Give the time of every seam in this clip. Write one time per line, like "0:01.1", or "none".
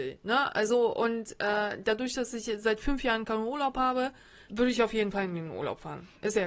0:04.5